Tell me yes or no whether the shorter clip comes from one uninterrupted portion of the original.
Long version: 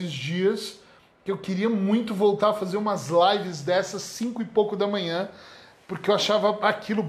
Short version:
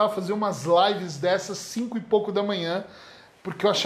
yes